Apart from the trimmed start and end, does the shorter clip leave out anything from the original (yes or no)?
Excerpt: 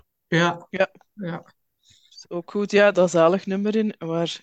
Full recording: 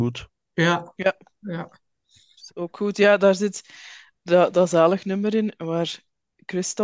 yes